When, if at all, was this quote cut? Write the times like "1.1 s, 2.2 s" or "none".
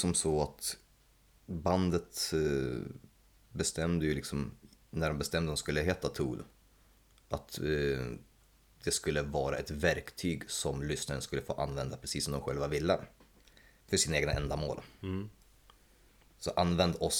none